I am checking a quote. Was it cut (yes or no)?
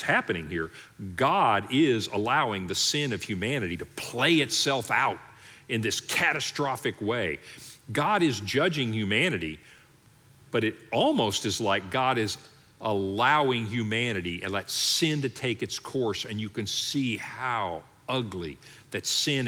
no